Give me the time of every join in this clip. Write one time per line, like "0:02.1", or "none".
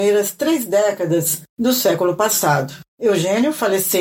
0:02.9